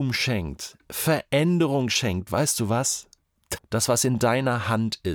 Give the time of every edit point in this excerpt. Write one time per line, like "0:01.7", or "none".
0:02.3
0:03.6